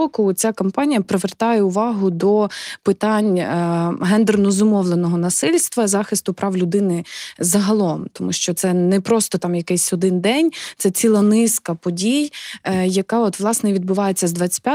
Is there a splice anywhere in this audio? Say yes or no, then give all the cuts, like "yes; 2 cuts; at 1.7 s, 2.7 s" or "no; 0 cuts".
no; 0 cuts